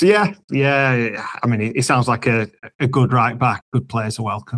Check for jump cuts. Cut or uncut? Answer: cut